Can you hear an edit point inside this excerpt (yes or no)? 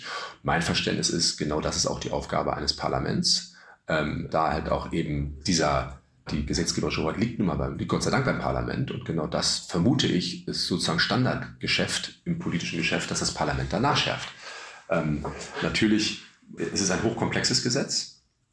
yes